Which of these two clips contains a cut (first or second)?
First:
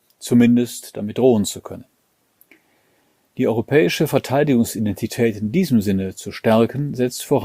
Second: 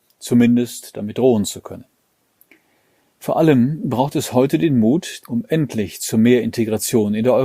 second